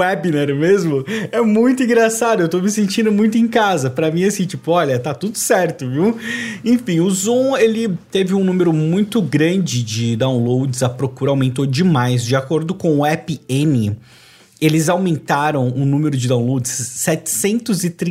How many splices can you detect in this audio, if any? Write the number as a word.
zero